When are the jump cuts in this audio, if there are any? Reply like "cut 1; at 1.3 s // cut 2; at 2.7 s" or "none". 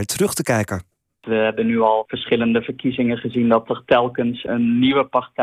none